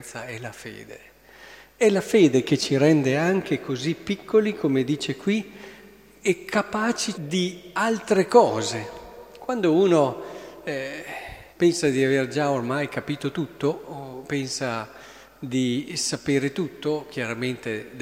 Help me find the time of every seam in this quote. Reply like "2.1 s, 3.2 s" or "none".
7.1 s, 11.5 s